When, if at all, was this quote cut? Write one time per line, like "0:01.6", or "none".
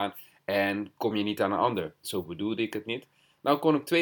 0:02.0